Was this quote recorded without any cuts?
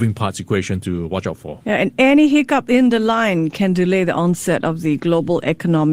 yes; 0 cuts

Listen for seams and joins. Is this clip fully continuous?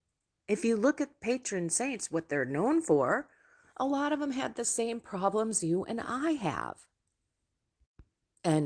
yes; 0 cuts

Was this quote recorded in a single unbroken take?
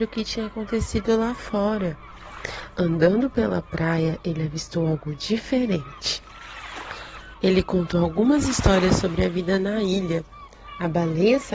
no; 1 cut; at 7.3 s

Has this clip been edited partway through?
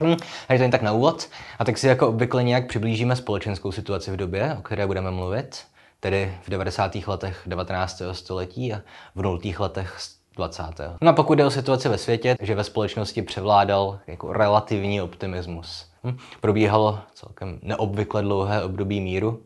yes; 3 cuts; at 11.0 s, 12.4 s, 16.0 s

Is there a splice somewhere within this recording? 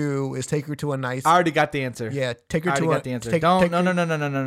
no; 0 cuts

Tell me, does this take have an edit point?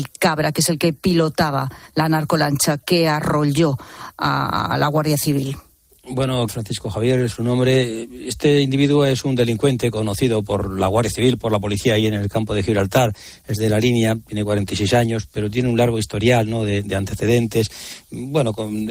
yes; 1 cut; at 6.5 s

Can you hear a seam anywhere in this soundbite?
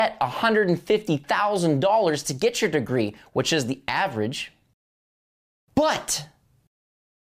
no; 0 cuts

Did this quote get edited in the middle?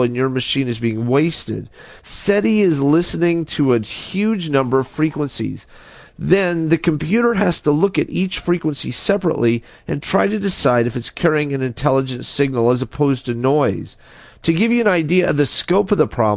yes; 1 cut; at 2.0 s

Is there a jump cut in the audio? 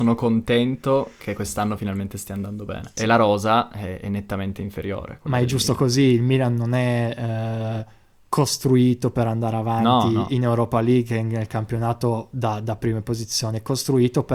yes; 1 cut; at 3.0 s

